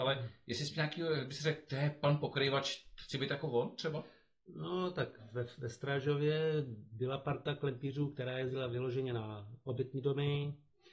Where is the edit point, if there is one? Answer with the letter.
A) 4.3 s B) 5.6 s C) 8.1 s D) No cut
D